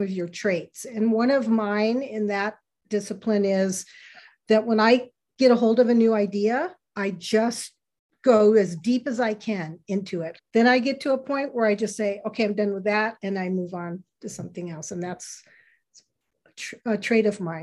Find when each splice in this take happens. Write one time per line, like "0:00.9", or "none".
0:10.4